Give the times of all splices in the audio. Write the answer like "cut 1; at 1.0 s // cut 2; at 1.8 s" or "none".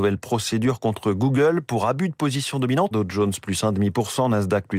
cut 1; at 2.9 s

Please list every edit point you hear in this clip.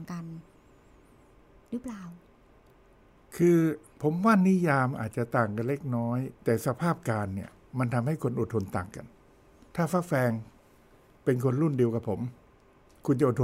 cut 1; at 6.4 s

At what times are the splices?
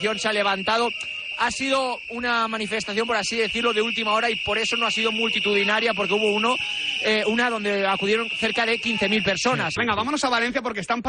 cut 1; at 9.8 s

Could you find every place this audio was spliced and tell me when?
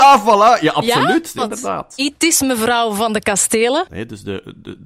cut 1; at 1.4 s // cut 2; at 3.9 s

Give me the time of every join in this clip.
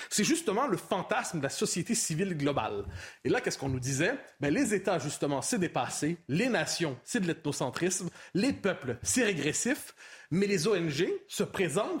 none

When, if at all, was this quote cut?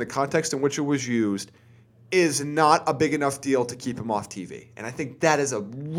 none

